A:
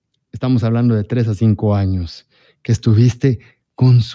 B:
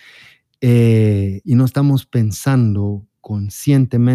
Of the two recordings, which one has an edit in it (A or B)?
B